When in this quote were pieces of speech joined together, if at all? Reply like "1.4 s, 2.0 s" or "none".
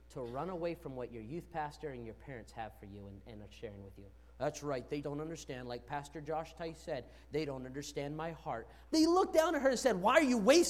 5.0 s, 8.9 s